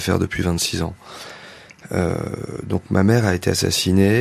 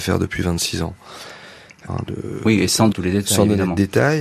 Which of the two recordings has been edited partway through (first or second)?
second